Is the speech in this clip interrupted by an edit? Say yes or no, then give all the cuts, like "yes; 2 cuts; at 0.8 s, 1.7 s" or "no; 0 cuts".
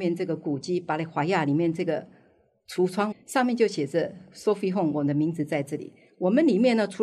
yes; 1 cut; at 3.1 s